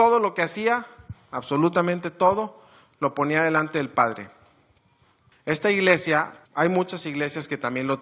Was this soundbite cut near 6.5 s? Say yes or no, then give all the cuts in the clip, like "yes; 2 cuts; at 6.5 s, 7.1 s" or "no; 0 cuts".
yes; 2 cuts; at 5.3 s, 6.5 s